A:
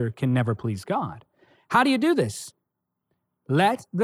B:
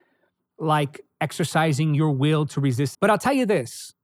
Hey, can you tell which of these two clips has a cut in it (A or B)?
B